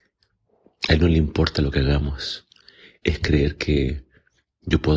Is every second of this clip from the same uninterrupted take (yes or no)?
yes